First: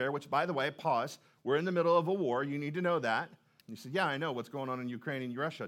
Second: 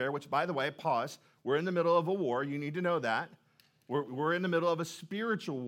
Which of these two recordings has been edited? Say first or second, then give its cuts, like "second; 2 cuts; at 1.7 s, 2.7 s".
first; 1 cut; at 3.6 s